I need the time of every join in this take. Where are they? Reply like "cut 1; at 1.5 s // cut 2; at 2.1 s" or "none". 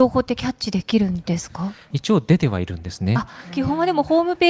cut 1; at 1.9 s